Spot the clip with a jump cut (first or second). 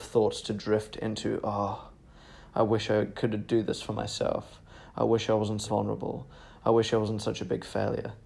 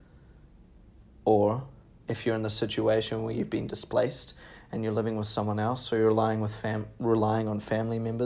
first